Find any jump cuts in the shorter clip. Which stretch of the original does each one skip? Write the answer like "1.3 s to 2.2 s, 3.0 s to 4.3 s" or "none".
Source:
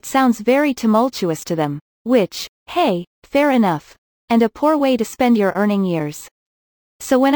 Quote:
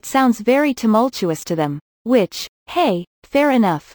none